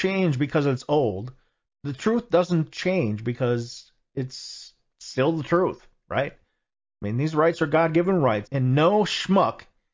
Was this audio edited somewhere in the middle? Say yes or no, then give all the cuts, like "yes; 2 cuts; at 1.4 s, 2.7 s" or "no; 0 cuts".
yes; 1 cut; at 8.5 s